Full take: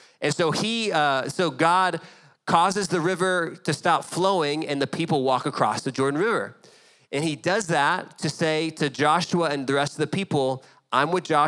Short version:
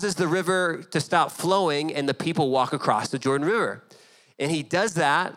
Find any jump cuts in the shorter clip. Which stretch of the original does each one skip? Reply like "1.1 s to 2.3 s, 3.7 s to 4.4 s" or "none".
none